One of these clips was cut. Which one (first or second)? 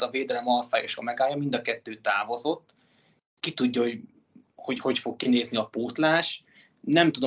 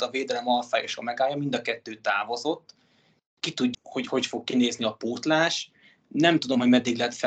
second